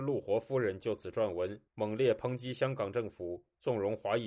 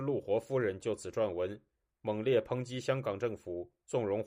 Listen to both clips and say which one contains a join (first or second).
first